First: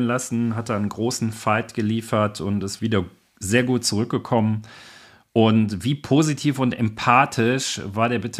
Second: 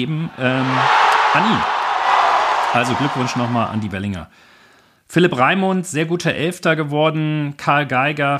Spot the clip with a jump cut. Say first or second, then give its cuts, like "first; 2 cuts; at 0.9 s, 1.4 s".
first; 1 cut; at 2.8 s